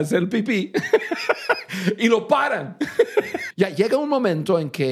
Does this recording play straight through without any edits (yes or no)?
no